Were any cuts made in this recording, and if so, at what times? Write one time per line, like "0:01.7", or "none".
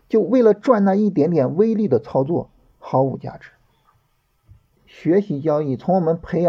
0:04.8

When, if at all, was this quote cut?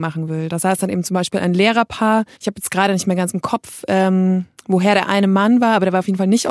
0:02.3

